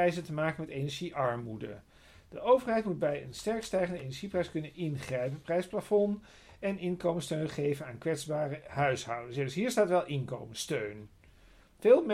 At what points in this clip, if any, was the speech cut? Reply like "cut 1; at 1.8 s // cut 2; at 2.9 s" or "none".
none